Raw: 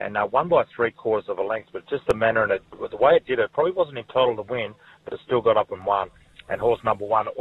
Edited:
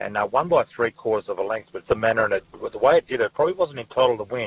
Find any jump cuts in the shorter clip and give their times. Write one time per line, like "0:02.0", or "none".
0:01.8